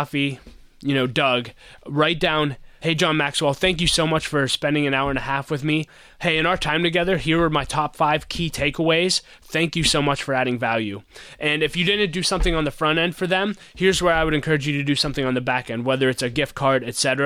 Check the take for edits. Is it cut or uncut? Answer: uncut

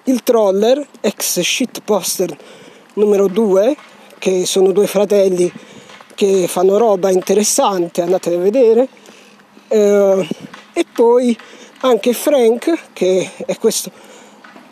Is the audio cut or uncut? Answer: uncut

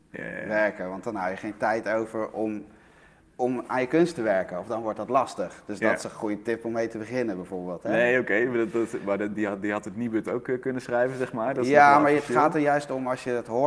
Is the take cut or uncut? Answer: uncut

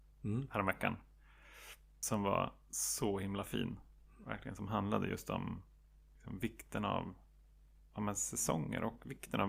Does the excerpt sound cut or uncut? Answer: uncut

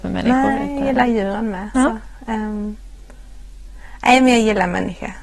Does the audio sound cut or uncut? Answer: uncut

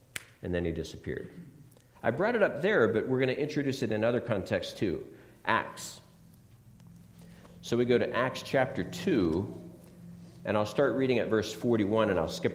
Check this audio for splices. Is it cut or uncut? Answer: cut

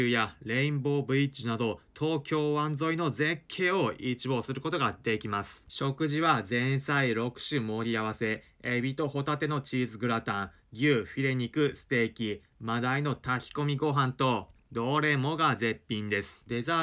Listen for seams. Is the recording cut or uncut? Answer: cut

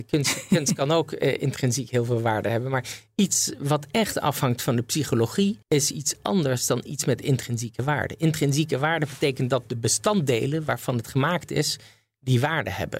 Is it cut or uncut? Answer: cut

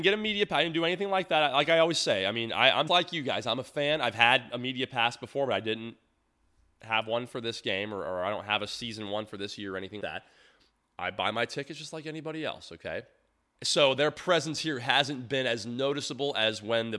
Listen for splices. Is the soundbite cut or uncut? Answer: cut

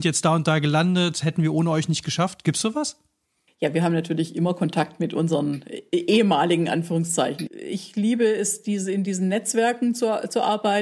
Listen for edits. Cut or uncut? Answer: cut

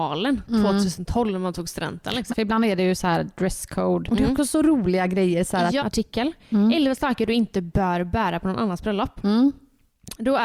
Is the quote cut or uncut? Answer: cut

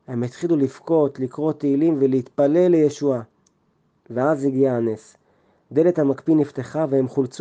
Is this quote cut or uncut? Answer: uncut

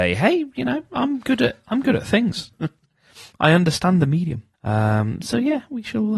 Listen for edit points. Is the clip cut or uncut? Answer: cut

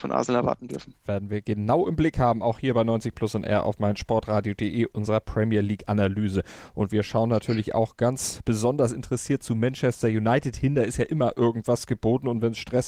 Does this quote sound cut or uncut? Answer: uncut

